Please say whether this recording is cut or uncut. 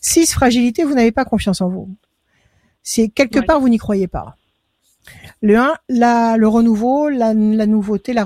uncut